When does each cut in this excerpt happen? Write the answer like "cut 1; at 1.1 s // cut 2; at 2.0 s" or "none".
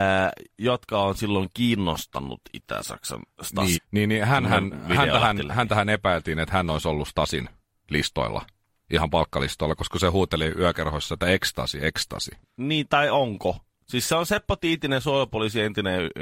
cut 1; at 3.7 s // cut 2; at 12.4 s